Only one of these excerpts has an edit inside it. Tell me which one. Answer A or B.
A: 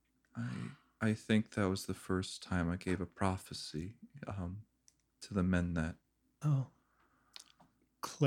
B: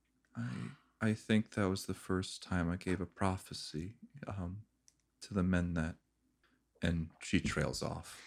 A